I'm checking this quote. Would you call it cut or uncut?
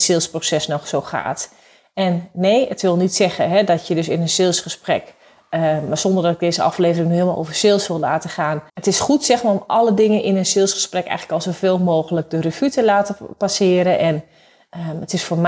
cut